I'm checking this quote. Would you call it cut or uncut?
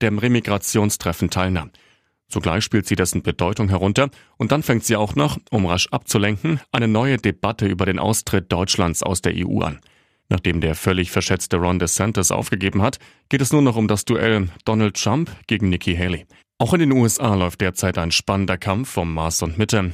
cut